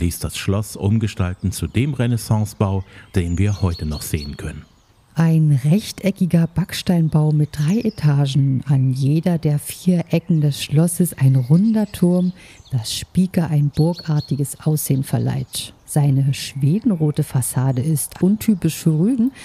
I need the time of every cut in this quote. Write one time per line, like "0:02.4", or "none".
0:15.8
0:18.2